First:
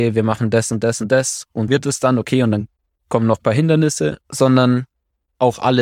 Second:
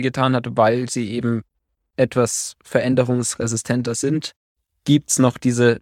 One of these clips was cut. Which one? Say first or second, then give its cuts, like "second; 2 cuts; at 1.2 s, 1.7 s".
first; 2 cuts; at 1.7 s, 4.2 s